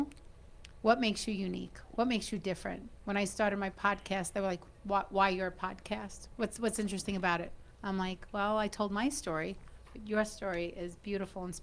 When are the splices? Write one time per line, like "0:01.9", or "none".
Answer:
0:07.7